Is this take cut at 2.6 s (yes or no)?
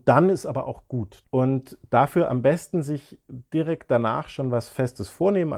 no